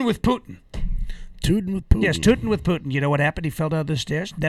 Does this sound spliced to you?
no; 0 cuts

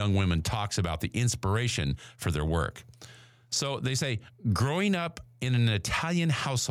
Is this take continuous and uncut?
yes; 0 cuts

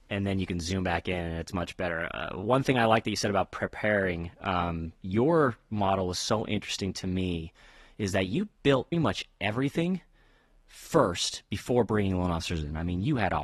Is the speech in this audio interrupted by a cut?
yes; 1 cut; at 8.9 s

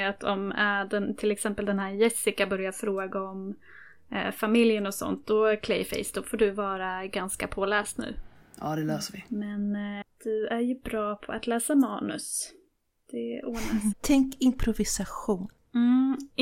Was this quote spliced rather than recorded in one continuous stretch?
yes; 2 cuts; at 10.0 s, 13.9 s

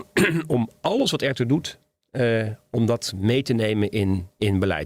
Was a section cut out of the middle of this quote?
no; 0 cuts

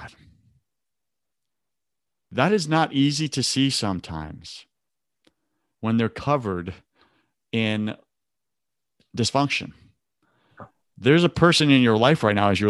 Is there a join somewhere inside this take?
no; 0 cuts

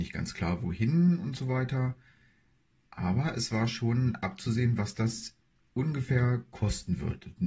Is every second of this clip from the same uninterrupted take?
yes; 0 cuts

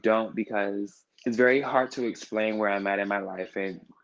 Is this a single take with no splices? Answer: no; 1 cut; at 1.1 s

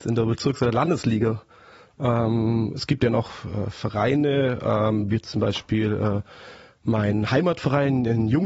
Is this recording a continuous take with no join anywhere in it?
yes; 0 cuts

